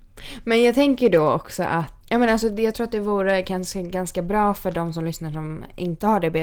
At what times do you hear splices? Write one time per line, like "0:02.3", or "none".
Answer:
0:02.0